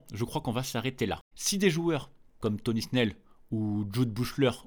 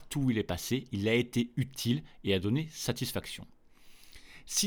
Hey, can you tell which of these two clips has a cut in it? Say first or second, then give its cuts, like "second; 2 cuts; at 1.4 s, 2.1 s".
first; 1 cut; at 1.3 s